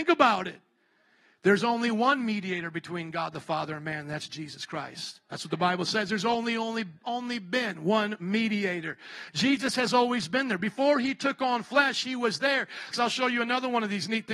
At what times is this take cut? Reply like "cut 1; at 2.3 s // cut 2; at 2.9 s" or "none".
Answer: cut 1; at 12.9 s